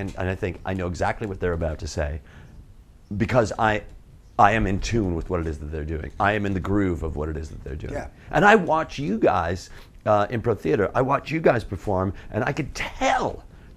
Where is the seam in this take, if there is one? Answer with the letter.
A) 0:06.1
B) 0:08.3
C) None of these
C